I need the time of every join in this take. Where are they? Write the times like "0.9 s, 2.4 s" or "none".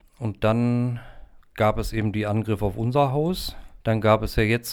3.8 s